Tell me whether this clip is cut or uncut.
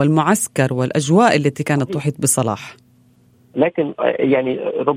uncut